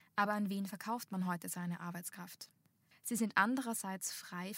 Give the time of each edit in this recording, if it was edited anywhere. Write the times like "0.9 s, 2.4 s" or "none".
2.9 s